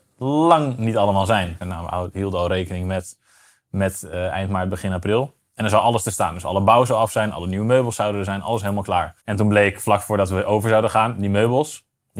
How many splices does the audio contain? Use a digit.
2